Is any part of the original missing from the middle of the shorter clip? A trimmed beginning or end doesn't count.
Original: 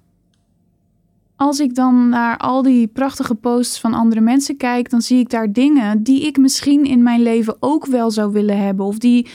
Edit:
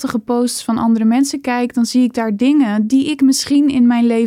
no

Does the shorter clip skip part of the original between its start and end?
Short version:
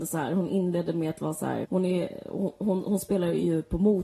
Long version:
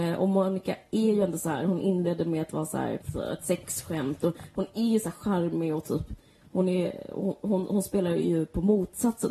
yes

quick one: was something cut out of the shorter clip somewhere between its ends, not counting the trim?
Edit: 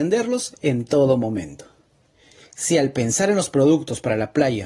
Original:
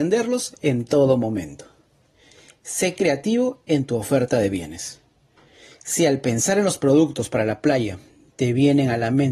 yes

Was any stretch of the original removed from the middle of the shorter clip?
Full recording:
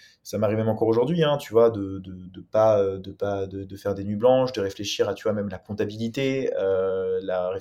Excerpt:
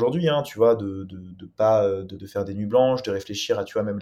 yes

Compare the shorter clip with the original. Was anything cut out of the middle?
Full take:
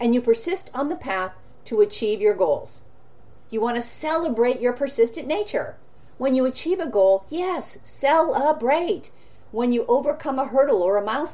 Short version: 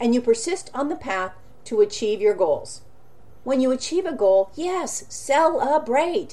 yes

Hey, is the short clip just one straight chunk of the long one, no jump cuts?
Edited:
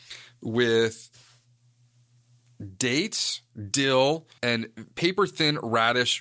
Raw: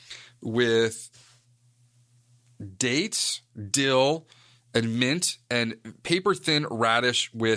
no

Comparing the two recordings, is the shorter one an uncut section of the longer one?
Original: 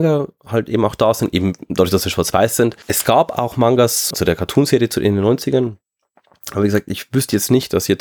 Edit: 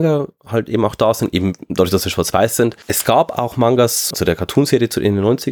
yes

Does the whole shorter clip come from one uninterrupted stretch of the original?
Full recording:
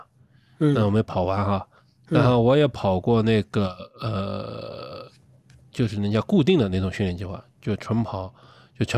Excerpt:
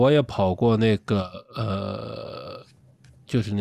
yes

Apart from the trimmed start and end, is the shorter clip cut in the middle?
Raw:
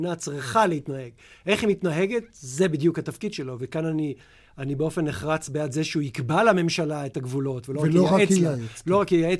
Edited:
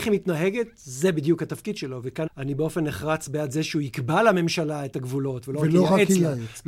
yes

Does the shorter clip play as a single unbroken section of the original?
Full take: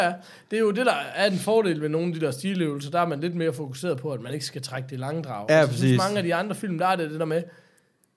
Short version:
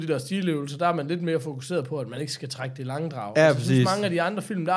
yes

